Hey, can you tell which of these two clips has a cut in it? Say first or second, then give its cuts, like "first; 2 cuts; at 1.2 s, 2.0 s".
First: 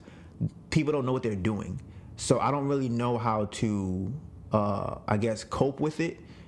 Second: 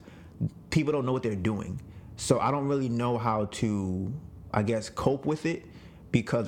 second; 1 cut; at 4.5 s